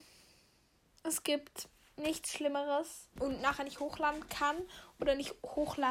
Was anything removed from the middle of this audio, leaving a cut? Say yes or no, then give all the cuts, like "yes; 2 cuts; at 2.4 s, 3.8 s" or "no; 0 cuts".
yes; 1 cut; at 3.2 s